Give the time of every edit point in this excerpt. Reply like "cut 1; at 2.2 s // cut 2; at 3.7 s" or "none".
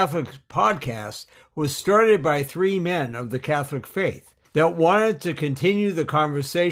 cut 1; at 4.4 s